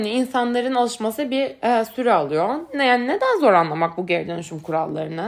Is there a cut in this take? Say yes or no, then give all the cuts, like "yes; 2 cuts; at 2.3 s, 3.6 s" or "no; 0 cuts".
no; 0 cuts